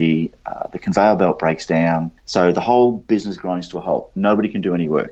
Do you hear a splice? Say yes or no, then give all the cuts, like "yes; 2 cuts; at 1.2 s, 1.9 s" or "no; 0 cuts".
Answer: yes; 1 cut; at 2.2 s